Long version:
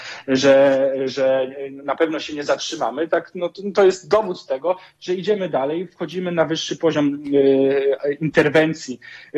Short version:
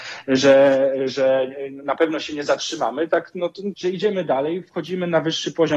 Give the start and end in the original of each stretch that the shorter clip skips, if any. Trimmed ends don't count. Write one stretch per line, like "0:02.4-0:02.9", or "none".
0:03.7-0:05.0